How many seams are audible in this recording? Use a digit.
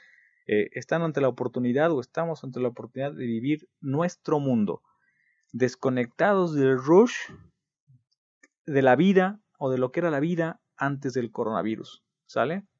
0